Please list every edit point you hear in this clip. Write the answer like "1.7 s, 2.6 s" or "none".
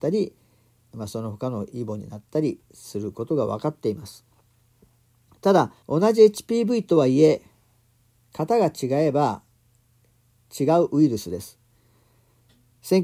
0.9 s, 5.8 s